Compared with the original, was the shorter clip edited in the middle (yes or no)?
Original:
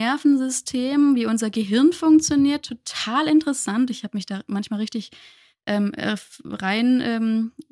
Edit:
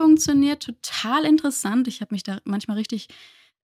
no